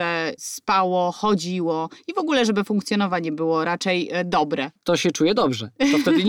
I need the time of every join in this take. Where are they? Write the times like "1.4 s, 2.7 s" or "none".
4.8 s